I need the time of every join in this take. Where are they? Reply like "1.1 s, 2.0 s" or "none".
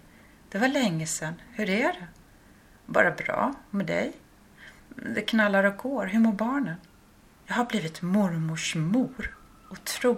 none